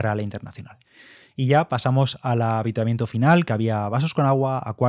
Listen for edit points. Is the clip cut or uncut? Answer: uncut